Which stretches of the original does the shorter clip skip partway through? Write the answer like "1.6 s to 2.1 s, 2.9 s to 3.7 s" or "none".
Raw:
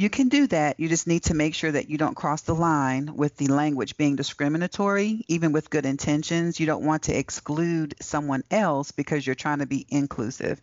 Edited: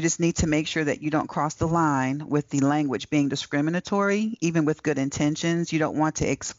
none